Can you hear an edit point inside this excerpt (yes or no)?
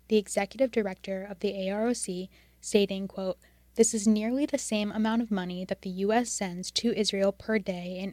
no